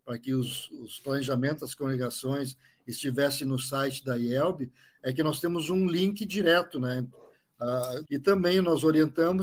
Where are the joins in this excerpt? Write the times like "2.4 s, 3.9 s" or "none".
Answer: 8.0 s

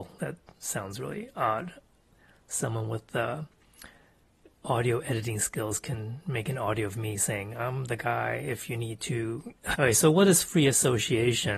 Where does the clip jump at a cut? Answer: 9.7 s

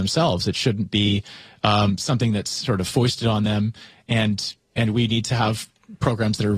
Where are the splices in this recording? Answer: none

